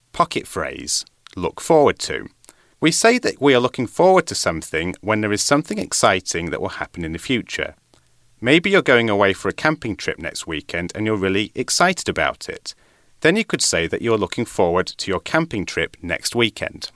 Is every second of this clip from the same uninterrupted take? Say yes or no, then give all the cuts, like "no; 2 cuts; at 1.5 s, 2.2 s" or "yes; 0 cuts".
yes; 0 cuts